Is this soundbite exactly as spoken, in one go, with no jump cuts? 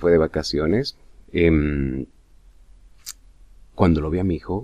no; 1 cut; at 1.2 s

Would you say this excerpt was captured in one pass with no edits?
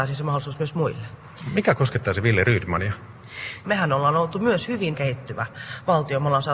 no; 2 cuts; at 3.6 s, 4.9 s

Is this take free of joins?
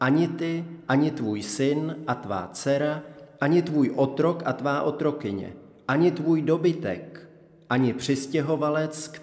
yes; 0 cuts

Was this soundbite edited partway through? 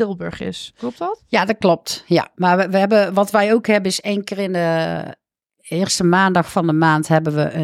no; 0 cuts

